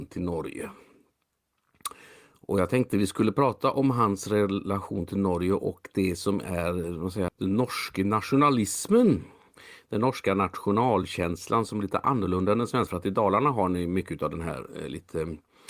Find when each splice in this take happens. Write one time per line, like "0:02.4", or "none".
0:07.3
0:12.9